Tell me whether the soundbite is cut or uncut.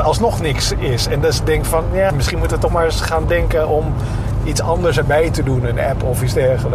cut